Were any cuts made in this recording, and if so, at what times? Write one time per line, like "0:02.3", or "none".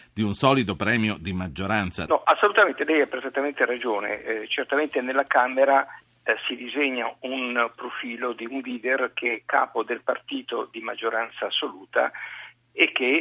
0:02.1